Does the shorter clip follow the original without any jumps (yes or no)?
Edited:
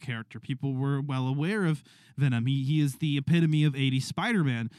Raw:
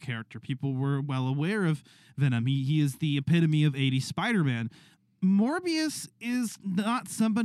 yes